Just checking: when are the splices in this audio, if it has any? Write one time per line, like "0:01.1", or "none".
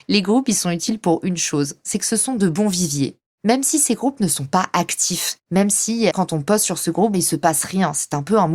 0:06.1
0:07.1

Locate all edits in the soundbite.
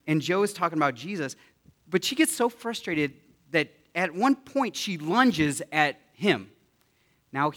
none

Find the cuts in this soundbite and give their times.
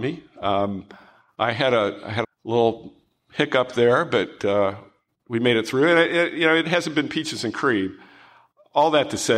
0:02.2

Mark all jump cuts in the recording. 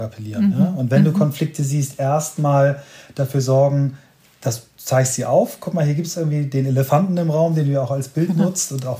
none

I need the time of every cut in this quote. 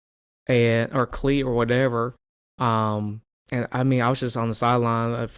none

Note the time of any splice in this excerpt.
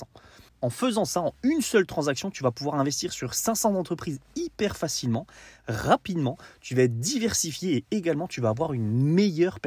none

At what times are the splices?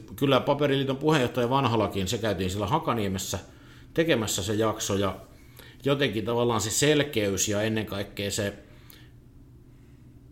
none

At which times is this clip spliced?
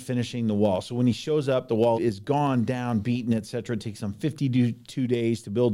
0:01.9

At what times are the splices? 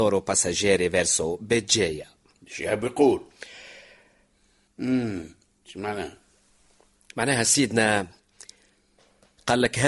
0:04.7

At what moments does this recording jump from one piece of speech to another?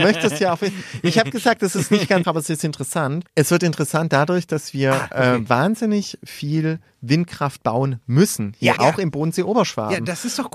0:02.2
0:03.3
0:08.8

